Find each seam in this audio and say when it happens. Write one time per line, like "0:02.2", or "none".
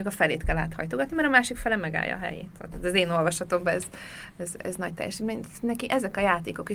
none